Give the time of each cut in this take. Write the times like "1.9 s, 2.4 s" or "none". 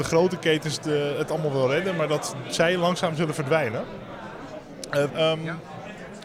5.1 s